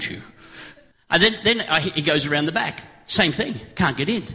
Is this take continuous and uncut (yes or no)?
no